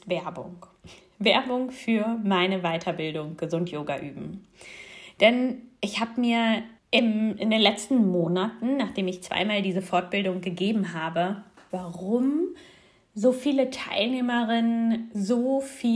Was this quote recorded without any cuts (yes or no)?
no